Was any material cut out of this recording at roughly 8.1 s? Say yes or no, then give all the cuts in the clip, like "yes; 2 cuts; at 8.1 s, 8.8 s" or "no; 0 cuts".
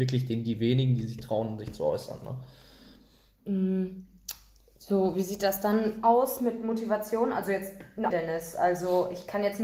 yes; 1 cut; at 8.1 s